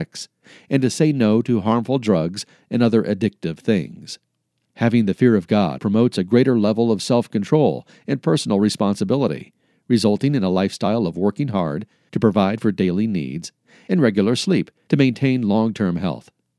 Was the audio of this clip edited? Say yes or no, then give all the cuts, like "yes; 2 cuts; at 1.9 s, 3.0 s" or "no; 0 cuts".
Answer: yes; 1 cut; at 5.8 s